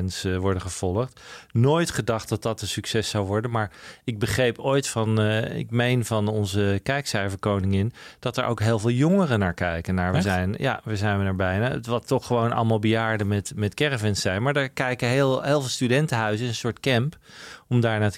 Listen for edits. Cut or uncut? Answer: uncut